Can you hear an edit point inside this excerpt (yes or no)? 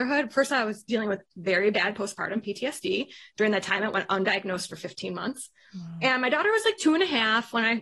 no